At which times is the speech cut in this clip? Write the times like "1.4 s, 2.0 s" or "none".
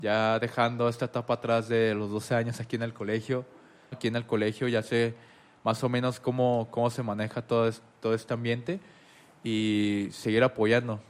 3.9 s